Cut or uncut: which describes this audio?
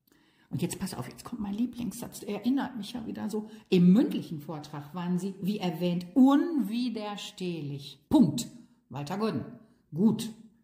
cut